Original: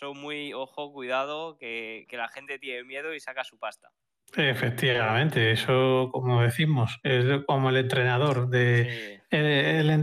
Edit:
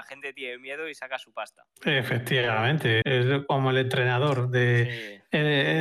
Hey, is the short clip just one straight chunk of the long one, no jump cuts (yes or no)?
no